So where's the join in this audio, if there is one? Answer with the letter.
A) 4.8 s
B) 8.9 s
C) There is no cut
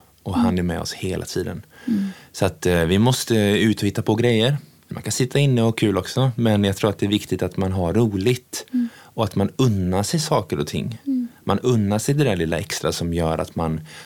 C